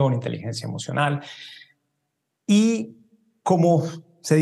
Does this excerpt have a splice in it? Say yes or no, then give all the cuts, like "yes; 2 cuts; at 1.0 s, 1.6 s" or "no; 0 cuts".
no; 0 cuts